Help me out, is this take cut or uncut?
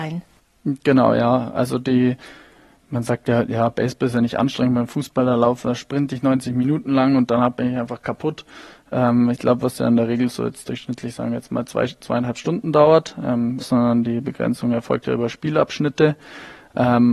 cut